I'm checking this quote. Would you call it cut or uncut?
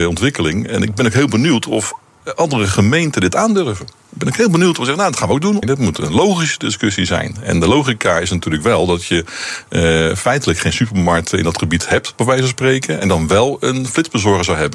cut